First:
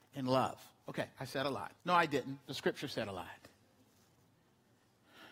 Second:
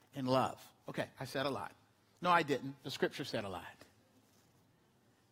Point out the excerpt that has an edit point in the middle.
first; 1 cut; at 1.8 s

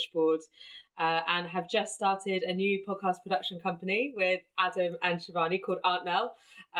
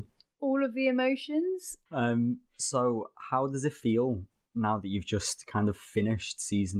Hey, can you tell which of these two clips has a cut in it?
second; 1 cut; at 1.9 s

